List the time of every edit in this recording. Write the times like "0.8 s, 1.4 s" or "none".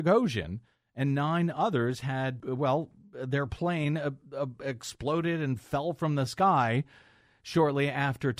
2.4 s